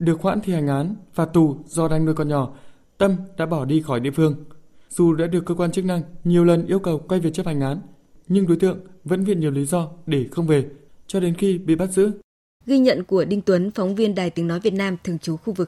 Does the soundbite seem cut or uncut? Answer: cut